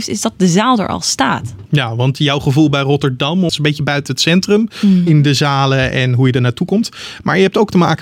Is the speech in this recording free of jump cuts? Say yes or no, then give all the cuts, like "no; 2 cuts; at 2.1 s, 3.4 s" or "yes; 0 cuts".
no; 1 cut; at 5.1 s